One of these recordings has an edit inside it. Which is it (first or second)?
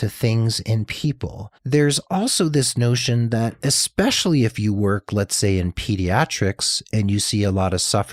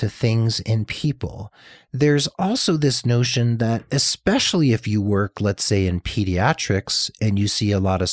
first